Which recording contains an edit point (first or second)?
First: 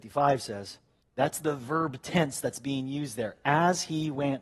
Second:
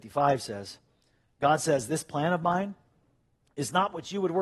first